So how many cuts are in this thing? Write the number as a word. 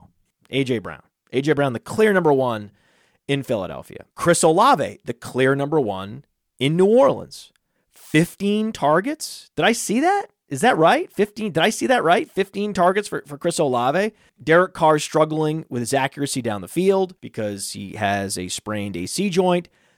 three